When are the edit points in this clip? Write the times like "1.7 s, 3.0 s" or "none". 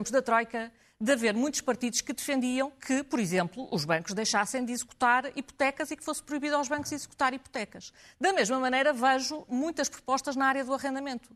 none